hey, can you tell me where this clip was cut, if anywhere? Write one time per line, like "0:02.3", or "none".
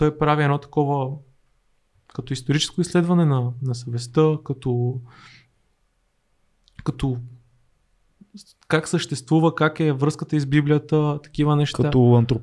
none